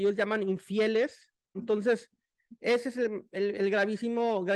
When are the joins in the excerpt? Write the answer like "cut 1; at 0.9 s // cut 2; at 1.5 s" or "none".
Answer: cut 1; at 1.5 s